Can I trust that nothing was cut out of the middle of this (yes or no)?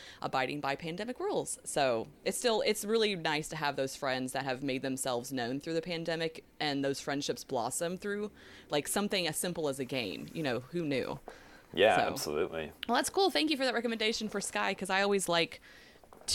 no